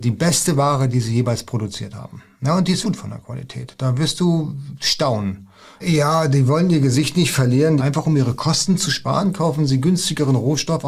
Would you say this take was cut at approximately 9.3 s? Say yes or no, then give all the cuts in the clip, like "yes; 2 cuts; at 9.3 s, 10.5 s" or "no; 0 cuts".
no; 3 cuts; at 2.8 s, 5.8 s, 7.8 s